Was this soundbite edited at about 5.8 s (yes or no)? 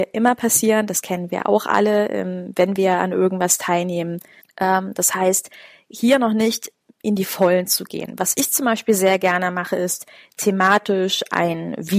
no